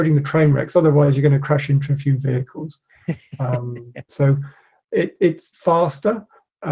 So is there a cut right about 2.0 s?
no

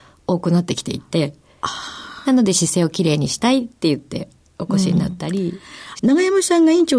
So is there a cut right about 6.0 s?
yes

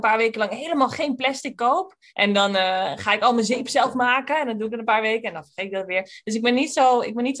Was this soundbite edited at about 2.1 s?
yes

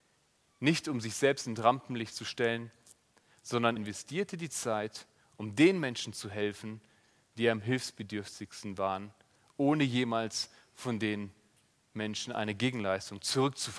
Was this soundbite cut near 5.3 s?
no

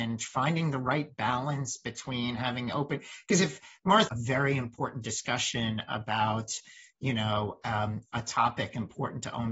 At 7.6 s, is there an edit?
no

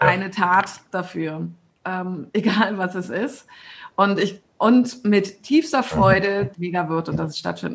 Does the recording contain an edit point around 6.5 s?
yes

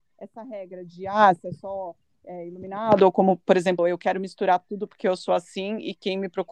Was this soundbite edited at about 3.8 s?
yes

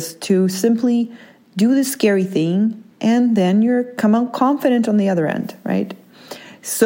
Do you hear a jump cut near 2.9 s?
yes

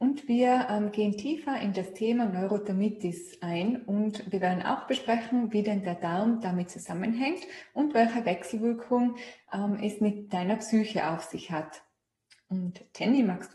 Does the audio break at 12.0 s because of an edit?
no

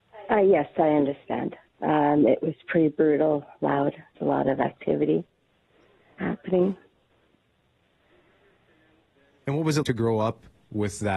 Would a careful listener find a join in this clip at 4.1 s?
yes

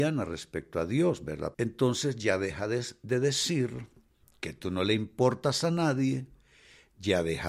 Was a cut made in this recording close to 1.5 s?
yes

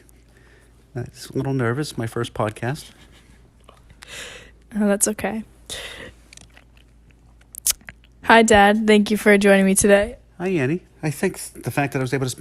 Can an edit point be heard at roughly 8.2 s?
yes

